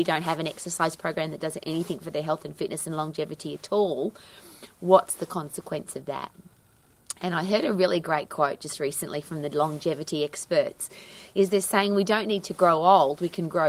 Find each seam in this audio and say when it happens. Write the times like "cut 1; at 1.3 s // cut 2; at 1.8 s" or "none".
none